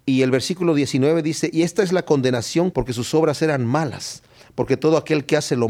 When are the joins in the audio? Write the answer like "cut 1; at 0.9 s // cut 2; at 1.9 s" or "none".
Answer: cut 1; at 2.7 s